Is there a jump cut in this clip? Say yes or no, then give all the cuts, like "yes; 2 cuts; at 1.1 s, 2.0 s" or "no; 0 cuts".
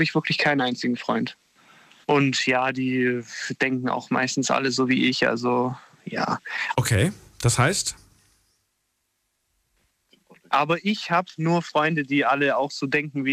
yes; 2 cuts; at 2.0 s, 6.7 s